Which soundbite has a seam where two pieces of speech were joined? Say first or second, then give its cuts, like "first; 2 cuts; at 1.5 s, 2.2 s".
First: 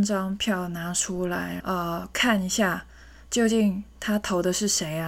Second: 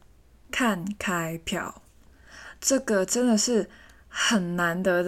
first; 1 cut; at 1.6 s